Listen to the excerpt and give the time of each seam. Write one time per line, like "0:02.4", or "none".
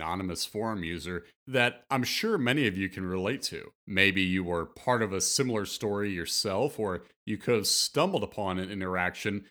0:03.8